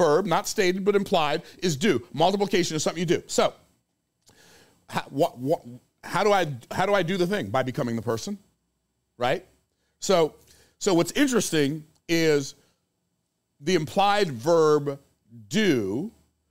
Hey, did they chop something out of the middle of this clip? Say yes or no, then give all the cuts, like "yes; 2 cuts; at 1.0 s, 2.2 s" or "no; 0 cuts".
no; 0 cuts